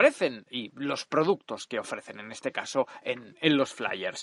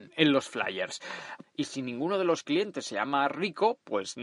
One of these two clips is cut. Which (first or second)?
second